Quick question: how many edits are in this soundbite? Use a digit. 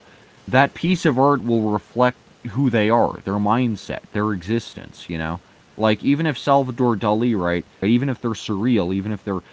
1